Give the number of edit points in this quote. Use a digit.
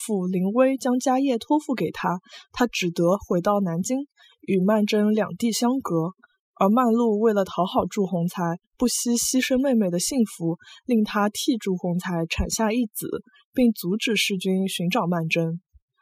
0